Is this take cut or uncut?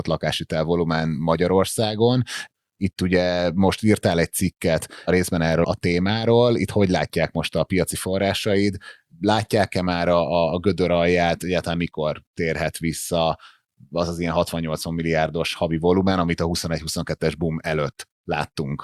cut